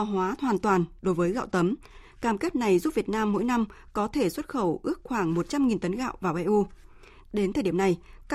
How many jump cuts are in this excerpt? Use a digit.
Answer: 0